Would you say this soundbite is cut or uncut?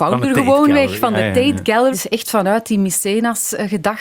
cut